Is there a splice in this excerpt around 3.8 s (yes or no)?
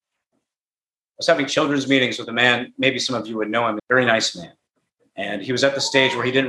yes